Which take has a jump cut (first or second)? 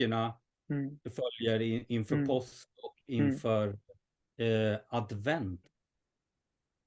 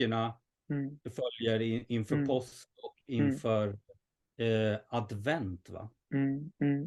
first